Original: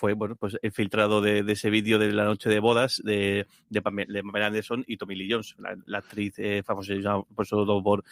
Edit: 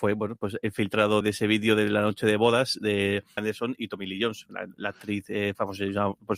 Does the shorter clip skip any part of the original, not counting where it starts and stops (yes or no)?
yes